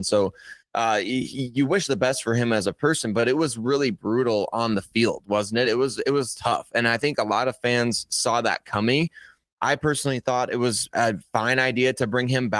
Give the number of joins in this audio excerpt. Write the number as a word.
zero